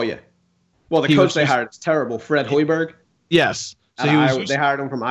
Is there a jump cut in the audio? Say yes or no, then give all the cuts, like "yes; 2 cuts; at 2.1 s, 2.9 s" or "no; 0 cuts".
no; 0 cuts